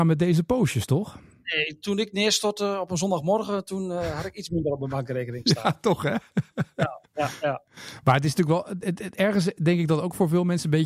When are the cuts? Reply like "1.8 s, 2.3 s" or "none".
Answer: none